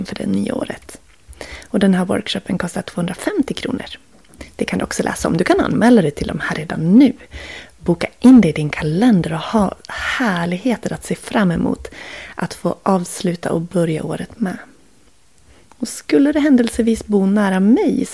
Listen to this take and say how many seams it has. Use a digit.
0